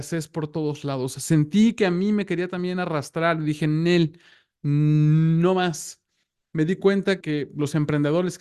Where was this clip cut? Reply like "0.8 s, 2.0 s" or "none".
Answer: 7.2 s